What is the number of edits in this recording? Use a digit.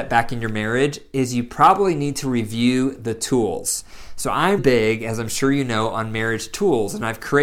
1